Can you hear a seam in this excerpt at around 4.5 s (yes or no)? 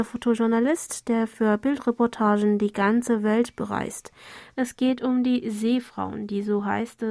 yes